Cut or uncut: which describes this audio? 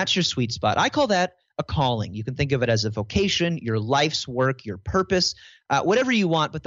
uncut